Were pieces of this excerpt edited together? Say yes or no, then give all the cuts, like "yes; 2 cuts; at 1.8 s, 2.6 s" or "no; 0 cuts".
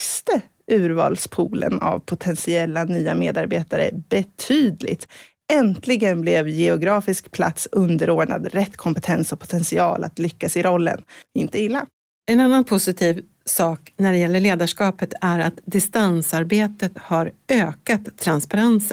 yes; 1 cut; at 11.2 s